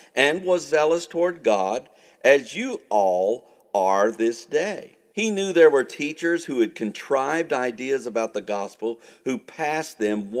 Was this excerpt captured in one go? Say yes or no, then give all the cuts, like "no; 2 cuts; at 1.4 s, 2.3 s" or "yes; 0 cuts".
no; 1 cut; at 5.1 s